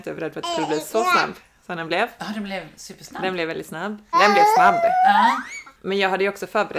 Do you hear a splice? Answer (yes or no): yes